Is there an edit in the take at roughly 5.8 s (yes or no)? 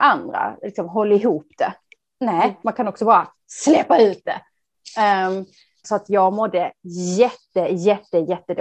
yes